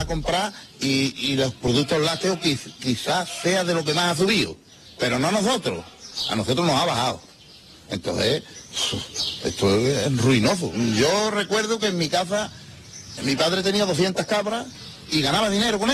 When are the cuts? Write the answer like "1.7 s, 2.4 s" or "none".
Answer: 13.2 s